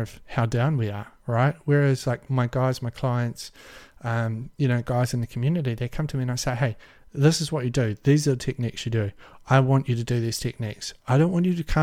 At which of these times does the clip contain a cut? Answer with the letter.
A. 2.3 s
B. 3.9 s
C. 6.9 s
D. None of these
A